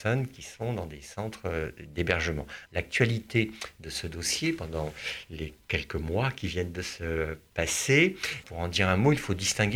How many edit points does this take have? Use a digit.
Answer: 2